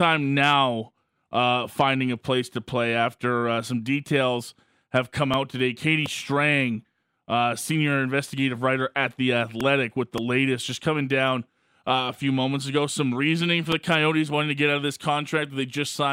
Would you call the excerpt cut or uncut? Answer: uncut